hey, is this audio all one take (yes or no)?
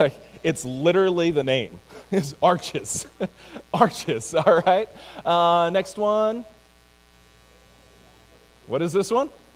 yes